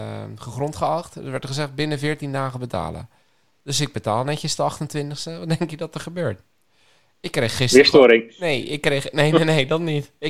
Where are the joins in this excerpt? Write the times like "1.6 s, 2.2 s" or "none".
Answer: none